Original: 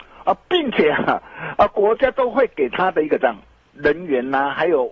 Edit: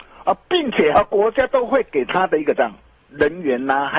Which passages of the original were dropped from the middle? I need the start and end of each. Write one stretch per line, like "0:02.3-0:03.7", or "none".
0:00.9-0:01.6